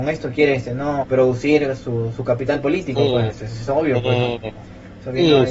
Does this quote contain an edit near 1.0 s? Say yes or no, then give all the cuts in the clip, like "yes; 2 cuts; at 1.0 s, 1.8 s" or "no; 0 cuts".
yes; 2 cuts; at 1.0 s, 3.3 s